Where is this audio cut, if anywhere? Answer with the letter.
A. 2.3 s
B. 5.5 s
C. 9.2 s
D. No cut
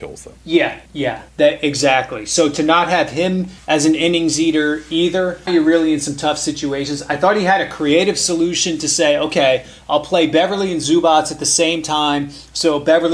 B